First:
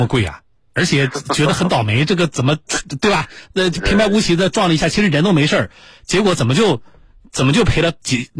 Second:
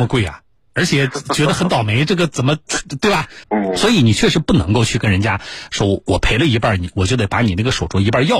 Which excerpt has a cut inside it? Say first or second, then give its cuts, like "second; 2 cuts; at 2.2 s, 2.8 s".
second; 1 cut; at 3.4 s